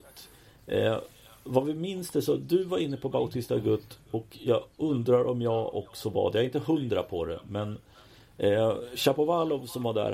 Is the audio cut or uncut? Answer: uncut